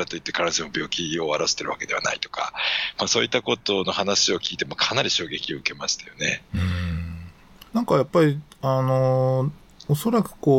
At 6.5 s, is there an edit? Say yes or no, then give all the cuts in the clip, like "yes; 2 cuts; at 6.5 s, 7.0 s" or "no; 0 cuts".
no; 1 cut; at 7.7 s